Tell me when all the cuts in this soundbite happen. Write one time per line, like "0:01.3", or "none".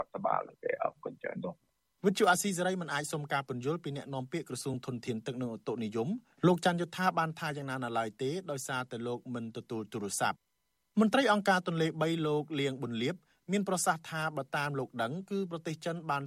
none